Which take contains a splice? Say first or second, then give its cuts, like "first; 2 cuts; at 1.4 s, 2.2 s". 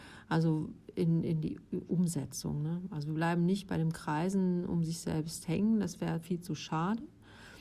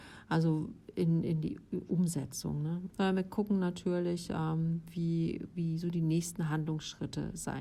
second; 1 cut; at 2.9 s